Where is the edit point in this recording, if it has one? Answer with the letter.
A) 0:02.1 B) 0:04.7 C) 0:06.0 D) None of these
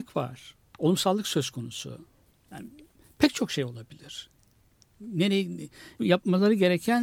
C